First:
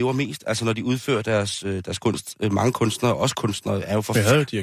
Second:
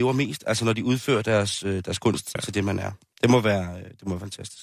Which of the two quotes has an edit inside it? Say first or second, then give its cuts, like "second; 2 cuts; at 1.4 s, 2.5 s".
second; 1 cut; at 2.4 s